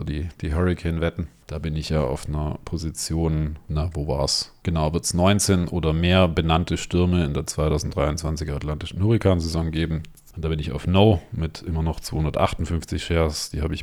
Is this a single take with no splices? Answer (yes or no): yes